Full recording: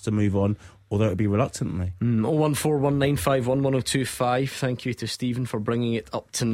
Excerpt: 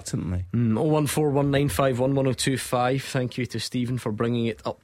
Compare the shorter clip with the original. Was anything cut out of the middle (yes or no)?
no